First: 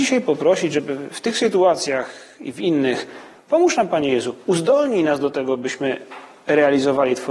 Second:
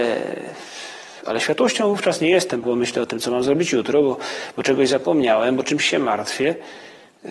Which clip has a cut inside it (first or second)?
second